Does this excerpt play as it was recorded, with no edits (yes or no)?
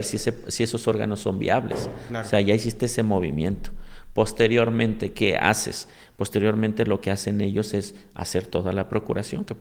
yes